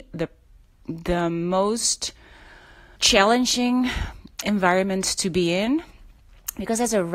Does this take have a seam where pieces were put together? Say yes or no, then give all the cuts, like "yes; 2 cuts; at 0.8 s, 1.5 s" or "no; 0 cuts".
yes; 2 cuts; at 3.0 s, 4.4 s